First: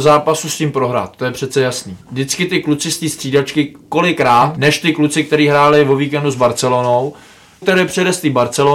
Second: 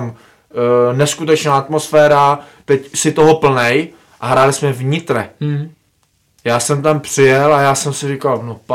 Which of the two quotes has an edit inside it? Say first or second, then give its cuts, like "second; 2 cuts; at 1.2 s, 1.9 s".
first; 2 cuts; at 4.6 s, 7.6 s